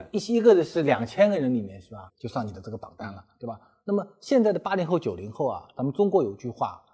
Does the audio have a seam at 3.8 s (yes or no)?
no